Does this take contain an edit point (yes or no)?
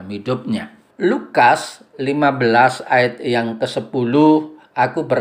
yes